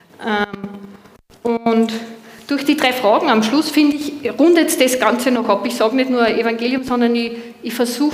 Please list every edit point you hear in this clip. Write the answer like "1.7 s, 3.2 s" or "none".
none